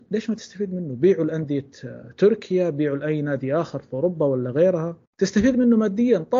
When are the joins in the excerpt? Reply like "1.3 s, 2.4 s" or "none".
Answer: 5.1 s